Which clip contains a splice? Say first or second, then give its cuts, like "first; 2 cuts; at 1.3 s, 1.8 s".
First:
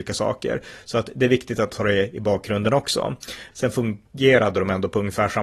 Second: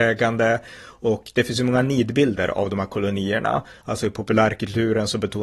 first; 1 cut; at 3.5 s